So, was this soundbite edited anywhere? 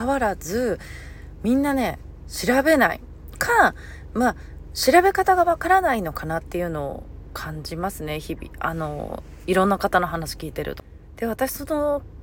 no; 0 cuts

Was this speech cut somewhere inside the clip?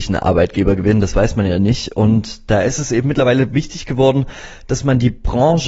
no; 0 cuts

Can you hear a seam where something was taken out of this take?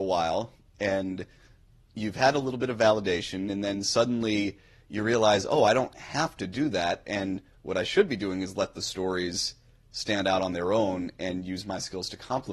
no; 0 cuts

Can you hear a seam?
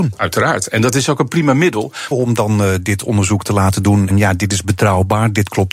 yes; 2 cuts; at 2.1 s, 4.1 s

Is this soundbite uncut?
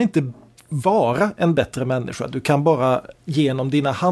yes; 0 cuts

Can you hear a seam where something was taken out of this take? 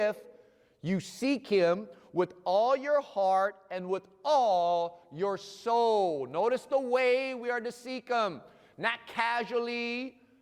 no; 0 cuts

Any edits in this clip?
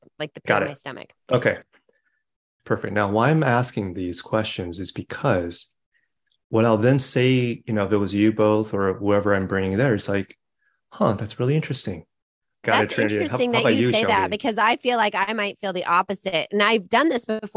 yes; 2 cuts; at 2.6 s, 12.6 s

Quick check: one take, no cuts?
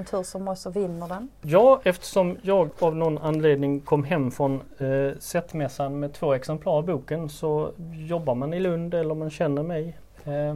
yes; 0 cuts

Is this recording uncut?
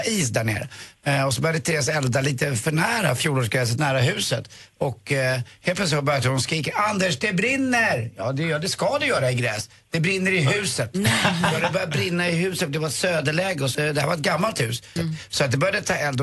no; 2 cuts; at 13.7 s, 15.0 s

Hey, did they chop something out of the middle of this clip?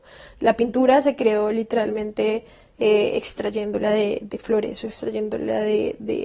no; 0 cuts

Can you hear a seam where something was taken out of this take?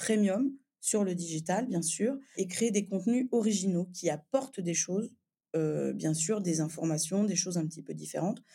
yes; 1 cut; at 2.3 s

